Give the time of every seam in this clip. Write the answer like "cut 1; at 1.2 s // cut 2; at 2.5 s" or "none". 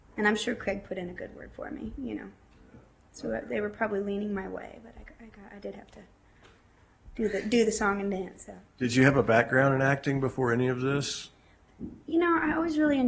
cut 1; at 8.7 s